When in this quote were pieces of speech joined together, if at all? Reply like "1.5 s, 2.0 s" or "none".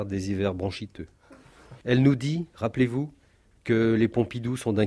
1.8 s

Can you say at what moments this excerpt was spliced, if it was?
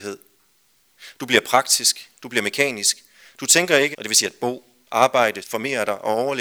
3.9 s, 5.4 s

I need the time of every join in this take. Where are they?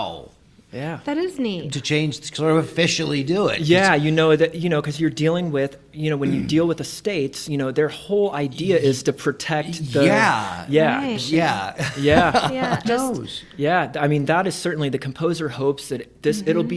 1.7 s, 11.2 s, 12.8 s

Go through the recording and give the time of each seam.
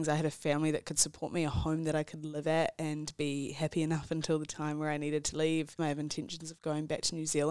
5.8 s

